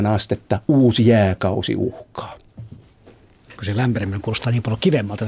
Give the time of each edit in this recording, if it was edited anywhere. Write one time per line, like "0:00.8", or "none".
none